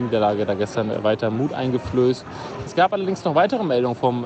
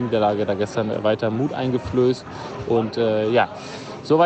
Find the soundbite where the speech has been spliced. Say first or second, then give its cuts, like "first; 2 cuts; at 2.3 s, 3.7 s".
first; 1 cut; at 2.7 s